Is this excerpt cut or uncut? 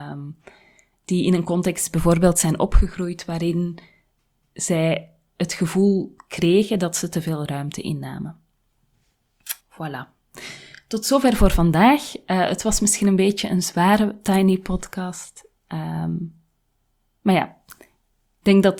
uncut